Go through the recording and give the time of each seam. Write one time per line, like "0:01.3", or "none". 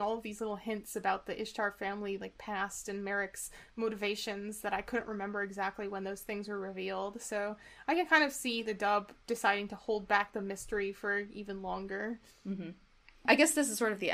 none